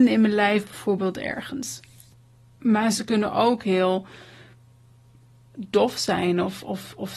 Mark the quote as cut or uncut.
uncut